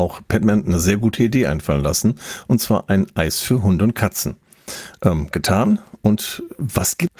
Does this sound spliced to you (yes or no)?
yes